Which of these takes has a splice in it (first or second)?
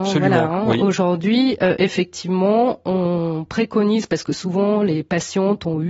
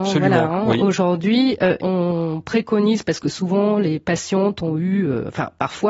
second